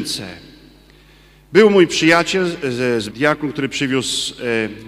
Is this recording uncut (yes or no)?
no